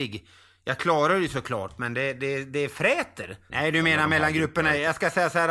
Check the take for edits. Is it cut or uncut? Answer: cut